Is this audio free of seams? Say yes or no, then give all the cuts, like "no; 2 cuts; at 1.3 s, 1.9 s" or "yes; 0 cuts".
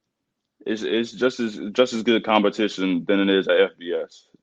yes; 0 cuts